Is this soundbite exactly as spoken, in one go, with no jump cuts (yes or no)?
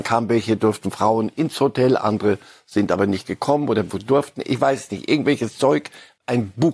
yes